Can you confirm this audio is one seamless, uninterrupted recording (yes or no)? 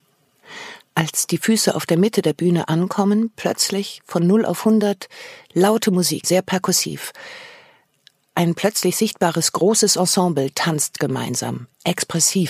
no